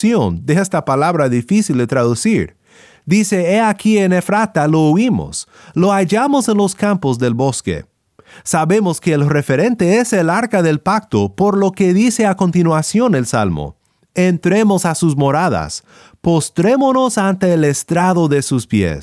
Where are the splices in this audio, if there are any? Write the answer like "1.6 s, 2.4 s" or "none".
none